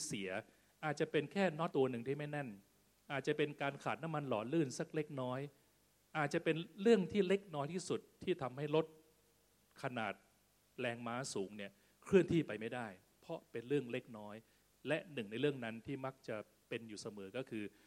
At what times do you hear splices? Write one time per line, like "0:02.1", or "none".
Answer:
0:01.7

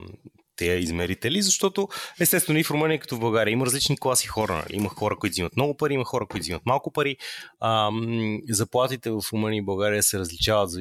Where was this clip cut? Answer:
none

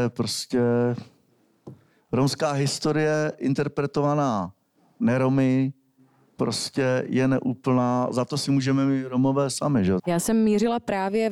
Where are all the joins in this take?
0:10.0

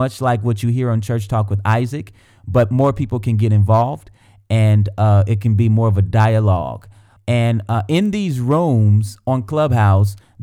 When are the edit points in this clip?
0:07.2

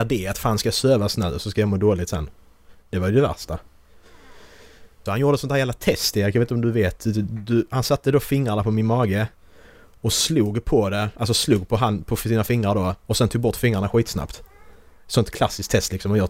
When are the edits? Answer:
0:05.1

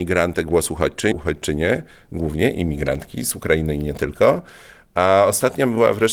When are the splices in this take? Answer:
0:01.1

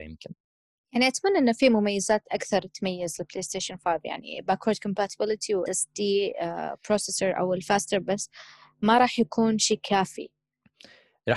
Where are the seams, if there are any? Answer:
0:05.7

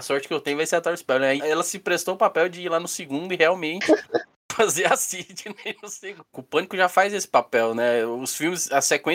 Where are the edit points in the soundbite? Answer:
0:01.4
0:06.3

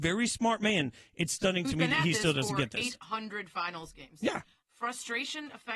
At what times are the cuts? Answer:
0:04.6

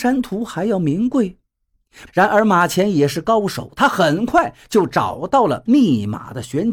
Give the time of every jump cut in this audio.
0:02.1

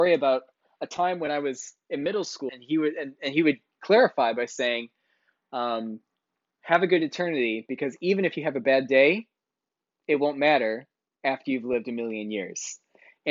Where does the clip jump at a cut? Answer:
0:02.5

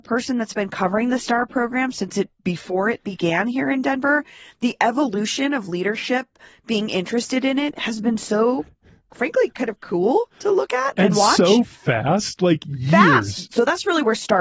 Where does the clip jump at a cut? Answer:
0:13.5

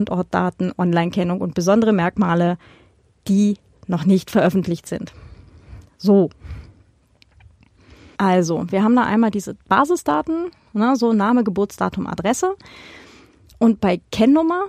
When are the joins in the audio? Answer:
0:08.1

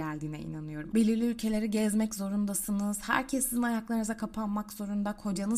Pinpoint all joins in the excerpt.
0:00.9

